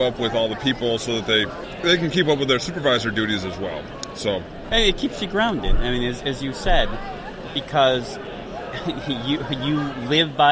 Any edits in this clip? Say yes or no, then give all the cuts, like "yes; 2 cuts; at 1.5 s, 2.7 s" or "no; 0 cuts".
no; 0 cuts